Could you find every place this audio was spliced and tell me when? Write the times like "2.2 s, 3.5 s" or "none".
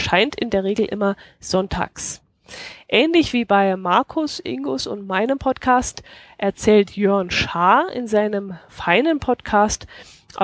none

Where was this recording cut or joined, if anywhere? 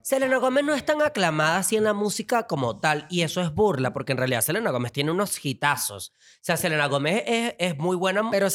none

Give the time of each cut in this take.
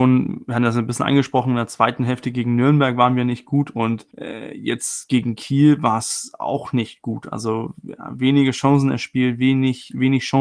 4.1 s

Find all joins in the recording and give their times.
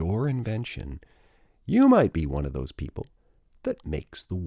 none

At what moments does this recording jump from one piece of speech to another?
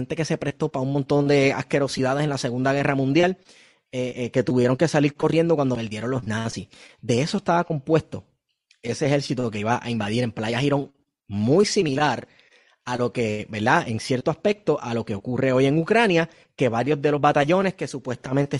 none

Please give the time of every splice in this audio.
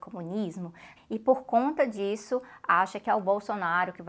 1.0 s

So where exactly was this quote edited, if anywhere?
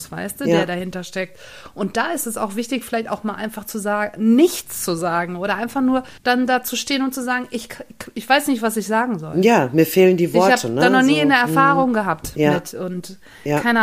6.2 s

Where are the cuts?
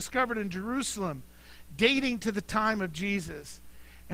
none

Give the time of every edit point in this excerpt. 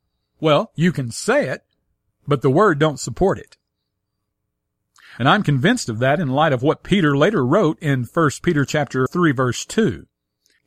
9.1 s

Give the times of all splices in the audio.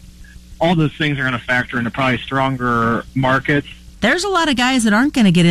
3.9 s

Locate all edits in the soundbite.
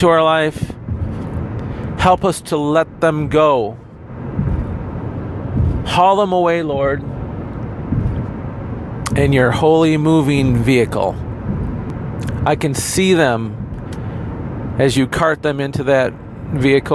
none

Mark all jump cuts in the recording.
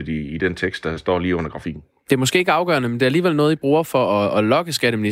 none

